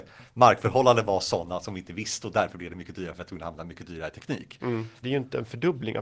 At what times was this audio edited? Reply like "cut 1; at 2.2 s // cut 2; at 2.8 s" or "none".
cut 1; at 5.0 s